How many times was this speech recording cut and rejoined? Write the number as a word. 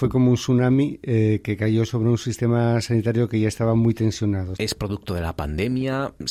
one